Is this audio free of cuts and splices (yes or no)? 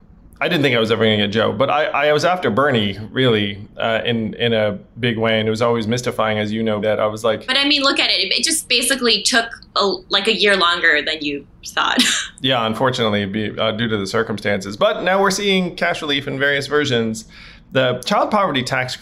no